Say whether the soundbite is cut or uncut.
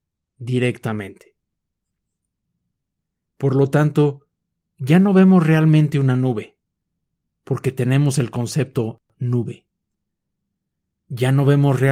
uncut